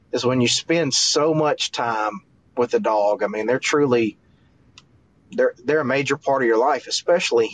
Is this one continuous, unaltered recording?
yes; 0 cuts

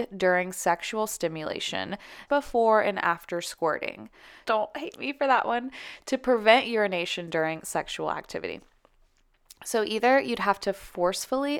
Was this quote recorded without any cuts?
no; 2 cuts; at 2.3 s, 4.4 s

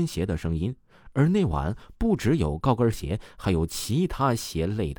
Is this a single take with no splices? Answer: yes; 0 cuts

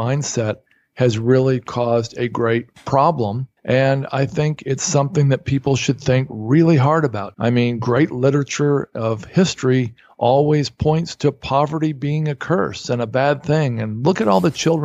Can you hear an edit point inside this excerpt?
yes; 2 cuts; at 3.6 s, 7.3 s

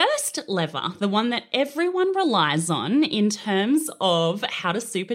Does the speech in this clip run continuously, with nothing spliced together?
yes; 0 cuts

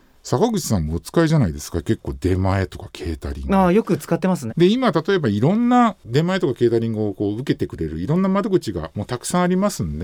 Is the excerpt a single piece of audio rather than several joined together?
no; 1 cut; at 4.5 s

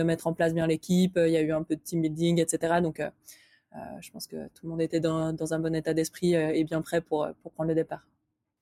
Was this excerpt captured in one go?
yes; 0 cuts

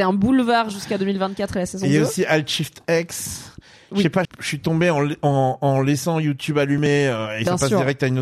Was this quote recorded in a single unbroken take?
no; 1 cut; at 4.2 s

